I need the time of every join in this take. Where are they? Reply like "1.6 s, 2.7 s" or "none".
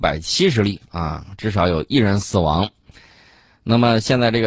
none

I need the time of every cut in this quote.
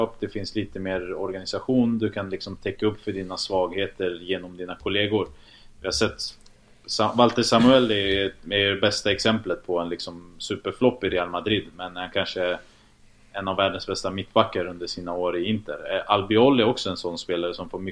none

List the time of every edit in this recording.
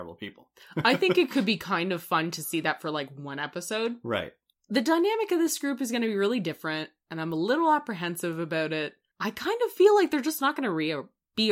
none

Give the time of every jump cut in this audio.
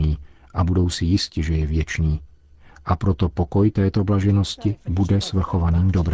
4.8 s

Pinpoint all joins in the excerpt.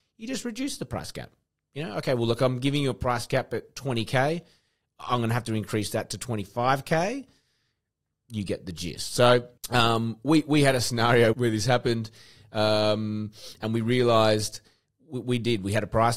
9.6 s, 11.3 s

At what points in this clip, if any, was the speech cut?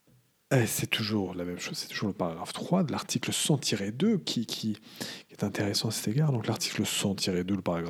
none

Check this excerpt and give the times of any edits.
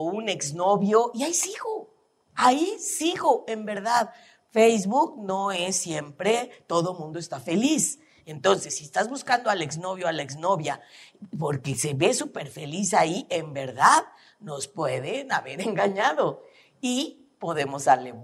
none

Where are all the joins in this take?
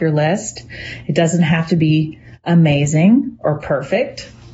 none

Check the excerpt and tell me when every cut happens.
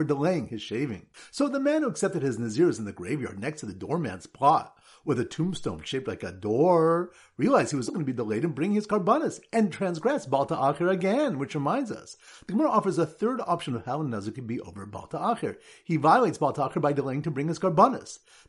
7.9 s

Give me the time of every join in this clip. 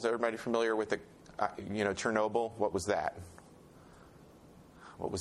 none

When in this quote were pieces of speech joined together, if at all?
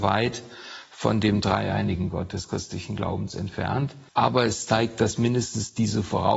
4.1 s

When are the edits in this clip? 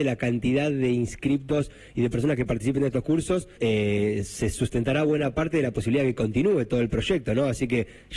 3.6 s

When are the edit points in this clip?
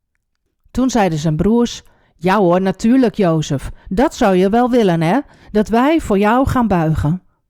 none

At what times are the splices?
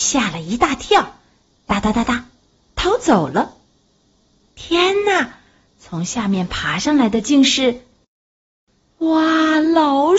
none

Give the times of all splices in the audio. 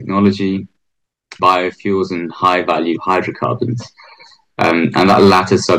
1.4 s

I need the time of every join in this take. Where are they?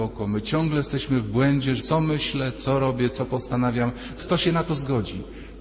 1.8 s, 4.2 s

